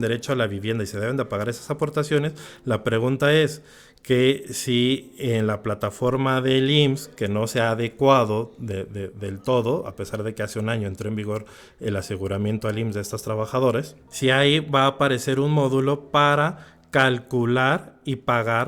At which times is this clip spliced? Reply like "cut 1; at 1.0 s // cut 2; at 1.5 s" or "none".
none

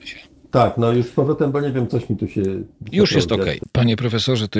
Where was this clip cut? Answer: cut 1; at 3.6 s

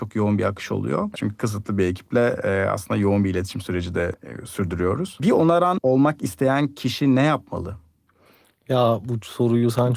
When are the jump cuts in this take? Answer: cut 1; at 1.1 s

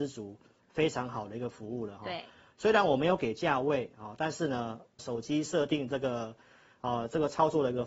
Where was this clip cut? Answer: cut 1; at 5.0 s

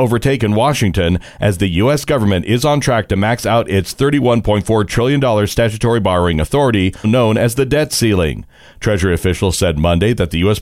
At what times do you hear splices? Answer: cut 1; at 7.0 s

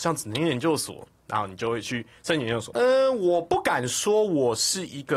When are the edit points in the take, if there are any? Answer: cut 1; at 2.7 s

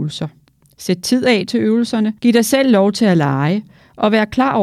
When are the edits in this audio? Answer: cut 1; at 2.2 s

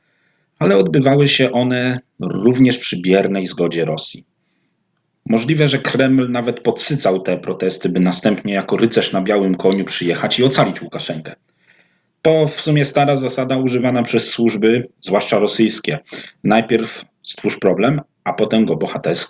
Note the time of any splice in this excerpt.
none

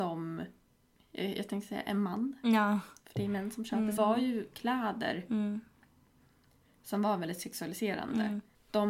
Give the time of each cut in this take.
cut 1; at 4.0 s

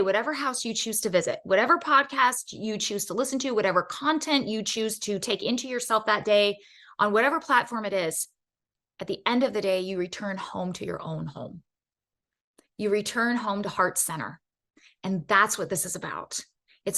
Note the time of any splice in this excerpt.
none

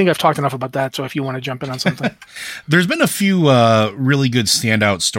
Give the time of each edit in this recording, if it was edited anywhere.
none

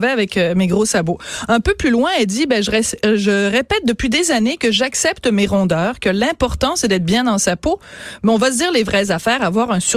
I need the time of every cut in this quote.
none

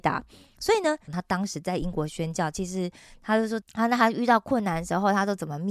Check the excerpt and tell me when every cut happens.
cut 1; at 1.1 s // cut 2; at 3.6 s

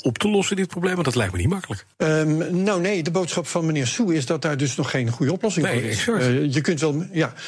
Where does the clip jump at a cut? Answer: cut 1; at 1.9 s

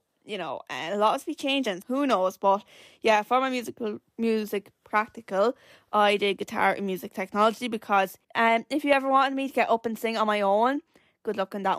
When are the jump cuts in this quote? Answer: cut 1; at 1.8 s // cut 2; at 8.2 s

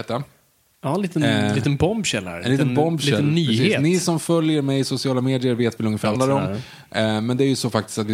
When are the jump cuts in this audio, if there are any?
cut 1; at 6.1 s

